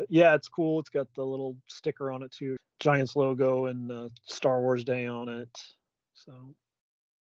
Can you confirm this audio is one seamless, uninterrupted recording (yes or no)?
no